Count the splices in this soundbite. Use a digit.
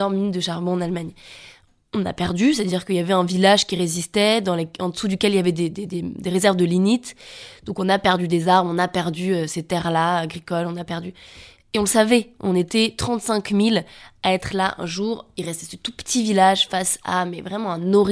0